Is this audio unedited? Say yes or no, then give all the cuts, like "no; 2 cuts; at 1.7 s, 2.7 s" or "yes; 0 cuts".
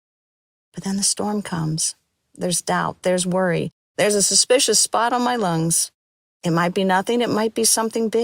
yes; 0 cuts